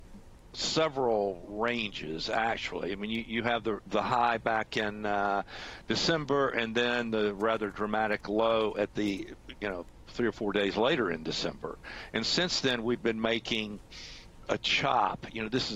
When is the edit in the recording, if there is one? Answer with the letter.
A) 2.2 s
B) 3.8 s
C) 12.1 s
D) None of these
B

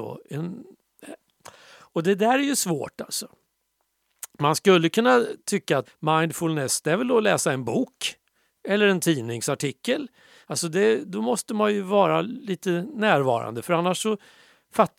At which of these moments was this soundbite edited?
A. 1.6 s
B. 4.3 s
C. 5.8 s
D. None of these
C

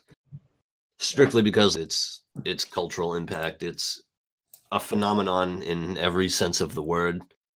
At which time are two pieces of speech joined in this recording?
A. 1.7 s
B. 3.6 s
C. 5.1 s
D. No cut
A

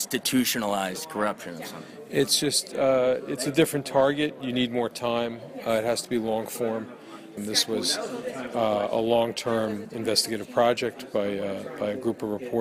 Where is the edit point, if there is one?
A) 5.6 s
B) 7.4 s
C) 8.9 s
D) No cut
B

